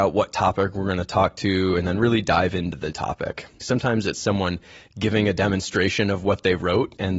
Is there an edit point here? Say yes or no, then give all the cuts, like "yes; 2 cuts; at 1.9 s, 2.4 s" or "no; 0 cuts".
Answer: yes; 1 cut; at 3.6 s